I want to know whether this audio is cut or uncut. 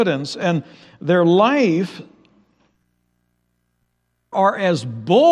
cut